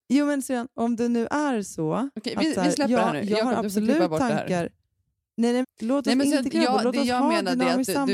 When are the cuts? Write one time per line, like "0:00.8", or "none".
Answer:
0:05.6